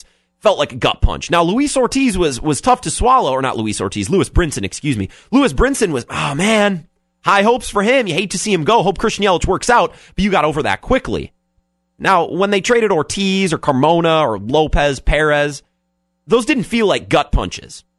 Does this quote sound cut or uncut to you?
uncut